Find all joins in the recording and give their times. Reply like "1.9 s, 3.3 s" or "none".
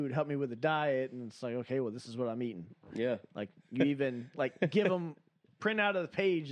none

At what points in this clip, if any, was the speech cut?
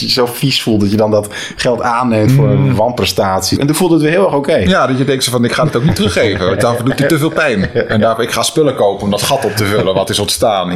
3.6 s

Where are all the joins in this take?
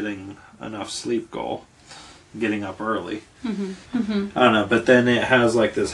3.8 s

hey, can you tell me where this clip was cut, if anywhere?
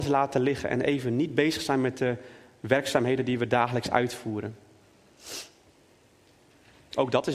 none

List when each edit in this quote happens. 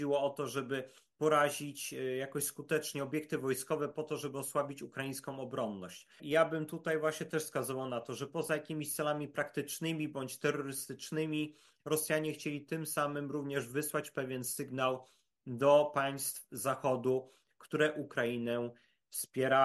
6.2 s

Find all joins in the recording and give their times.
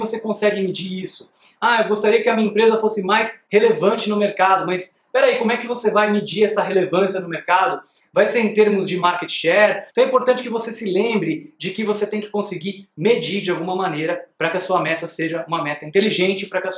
9.9 s

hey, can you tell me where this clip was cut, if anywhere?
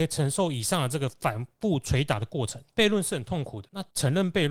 2.7 s

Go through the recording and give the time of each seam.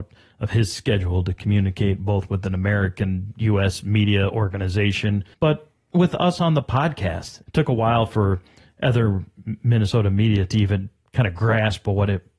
5.3 s, 7.4 s

